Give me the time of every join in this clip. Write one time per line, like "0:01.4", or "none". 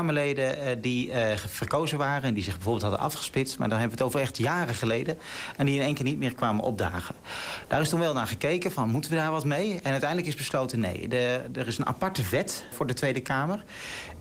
0:12.7